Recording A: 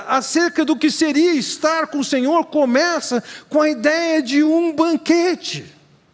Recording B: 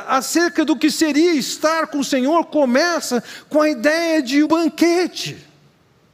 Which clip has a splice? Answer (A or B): B